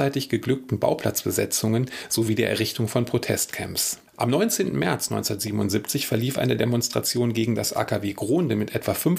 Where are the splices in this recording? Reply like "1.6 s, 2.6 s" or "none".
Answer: 4.1 s

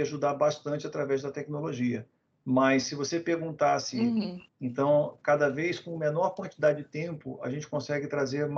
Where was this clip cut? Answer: 4.5 s

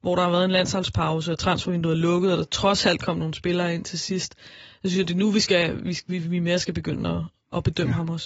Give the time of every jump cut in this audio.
none

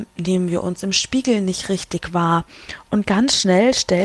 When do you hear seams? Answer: 2.9 s

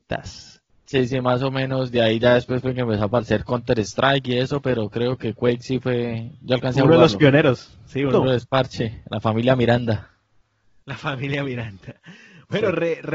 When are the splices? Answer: 8.1 s

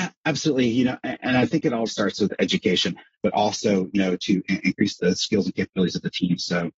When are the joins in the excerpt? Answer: 1.9 s, 3.1 s, 5.0 s

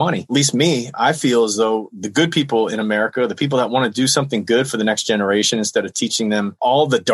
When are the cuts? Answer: none

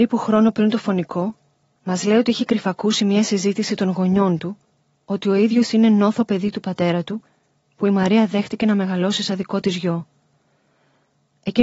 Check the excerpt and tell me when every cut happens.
none

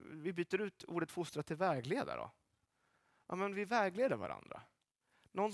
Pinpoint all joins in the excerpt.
none

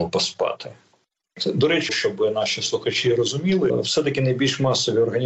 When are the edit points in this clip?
1.9 s, 3.7 s

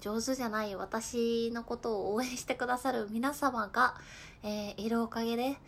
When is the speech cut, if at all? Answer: none

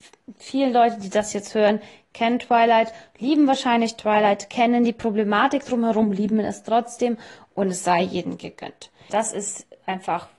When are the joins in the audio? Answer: 9.1 s

